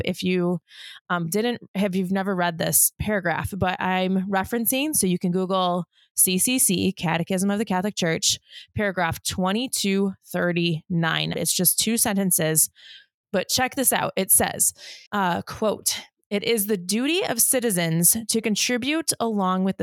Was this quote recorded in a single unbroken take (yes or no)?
no